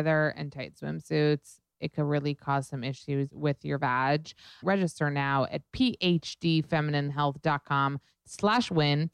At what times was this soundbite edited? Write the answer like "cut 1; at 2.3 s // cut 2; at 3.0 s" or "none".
cut 1; at 4.6 s

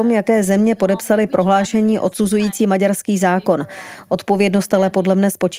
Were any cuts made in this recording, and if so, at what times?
none

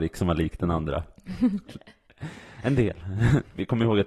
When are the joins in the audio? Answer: cut 1; at 1.7 s

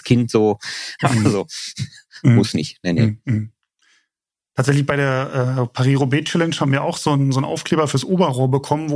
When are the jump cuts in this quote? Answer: cut 1; at 1.0 s

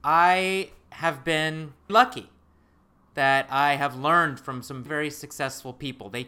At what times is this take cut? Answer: cut 1; at 1.9 s // cut 2; at 4.9 s

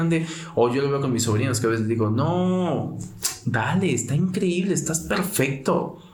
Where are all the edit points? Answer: none

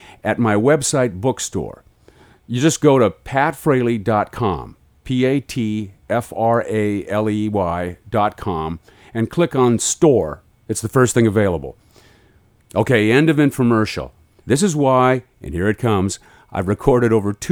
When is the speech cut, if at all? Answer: cut 1; at 14.4 s

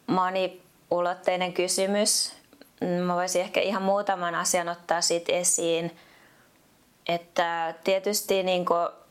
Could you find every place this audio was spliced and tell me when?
none

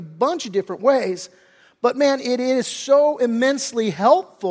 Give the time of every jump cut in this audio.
none

